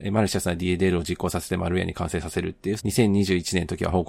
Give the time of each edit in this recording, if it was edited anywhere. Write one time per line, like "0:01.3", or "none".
0:02.8